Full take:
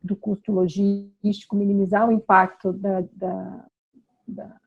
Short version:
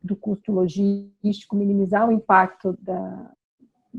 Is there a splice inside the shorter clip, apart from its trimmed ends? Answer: yes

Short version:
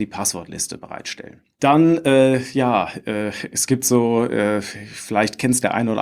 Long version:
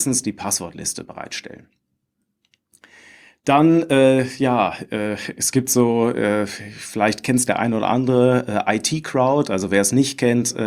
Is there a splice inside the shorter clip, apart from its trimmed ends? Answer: yes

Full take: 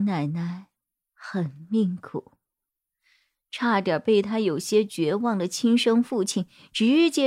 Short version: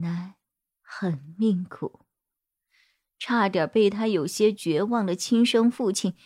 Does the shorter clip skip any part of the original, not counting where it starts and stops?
no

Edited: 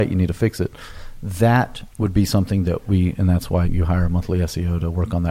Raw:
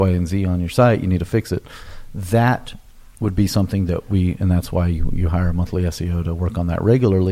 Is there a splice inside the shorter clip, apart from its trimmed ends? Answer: yes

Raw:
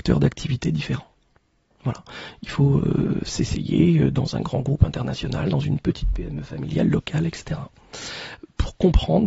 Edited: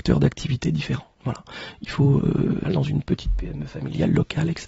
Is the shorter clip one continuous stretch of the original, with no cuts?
no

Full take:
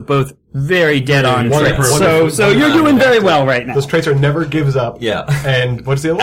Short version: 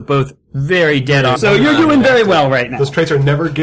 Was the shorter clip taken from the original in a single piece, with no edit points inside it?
no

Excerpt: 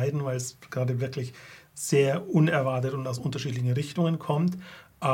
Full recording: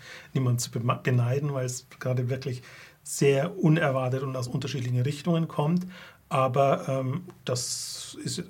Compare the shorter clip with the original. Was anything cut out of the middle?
no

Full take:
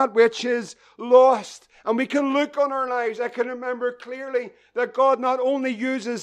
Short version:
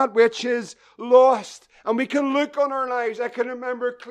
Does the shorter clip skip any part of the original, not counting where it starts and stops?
no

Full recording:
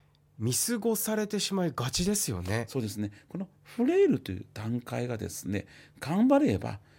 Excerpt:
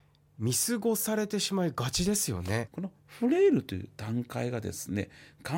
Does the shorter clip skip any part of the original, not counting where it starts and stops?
yes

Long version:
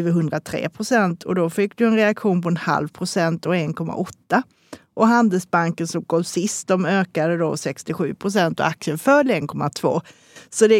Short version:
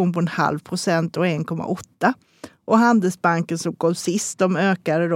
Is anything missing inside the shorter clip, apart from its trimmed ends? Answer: no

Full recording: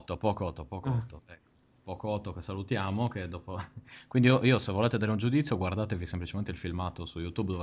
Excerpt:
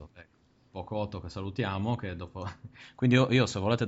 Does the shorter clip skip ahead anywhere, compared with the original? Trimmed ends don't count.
no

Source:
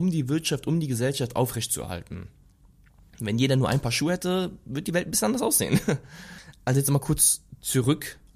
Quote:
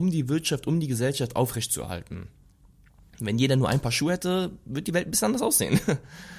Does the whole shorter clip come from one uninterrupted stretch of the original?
yes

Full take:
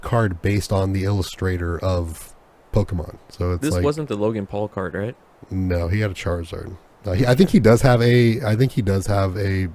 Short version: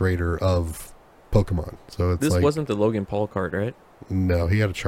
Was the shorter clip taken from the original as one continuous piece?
yes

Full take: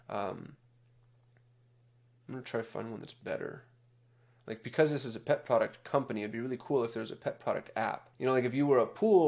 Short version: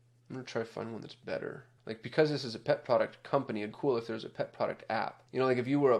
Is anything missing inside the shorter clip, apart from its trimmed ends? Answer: yes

